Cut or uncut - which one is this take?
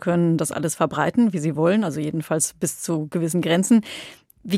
uncut